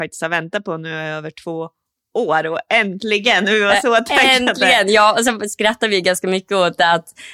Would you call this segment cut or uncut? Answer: uncut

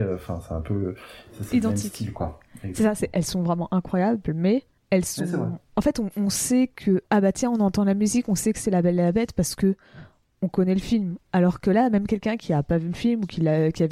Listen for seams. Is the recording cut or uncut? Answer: cut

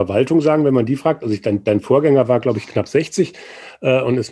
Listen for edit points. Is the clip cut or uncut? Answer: uncut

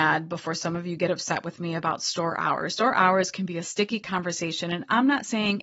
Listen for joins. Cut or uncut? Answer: uncut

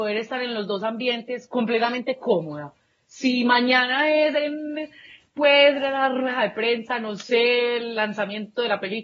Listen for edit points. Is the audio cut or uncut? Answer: uncut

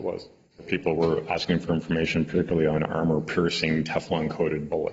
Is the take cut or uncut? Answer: uncut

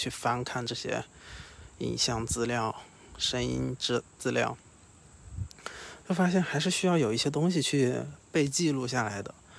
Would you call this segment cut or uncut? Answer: cut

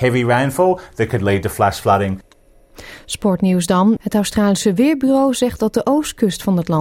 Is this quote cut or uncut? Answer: cut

